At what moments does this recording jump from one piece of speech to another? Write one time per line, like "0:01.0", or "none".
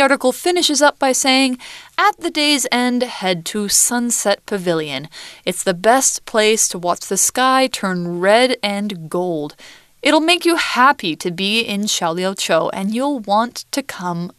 none

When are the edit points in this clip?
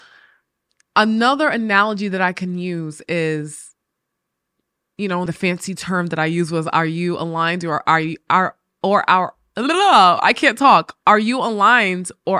0:05.3

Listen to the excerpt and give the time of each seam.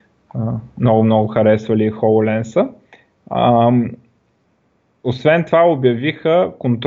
none

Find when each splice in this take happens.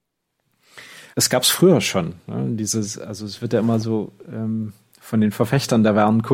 0:01.1

